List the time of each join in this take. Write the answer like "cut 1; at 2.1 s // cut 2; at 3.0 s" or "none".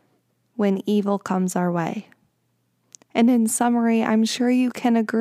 none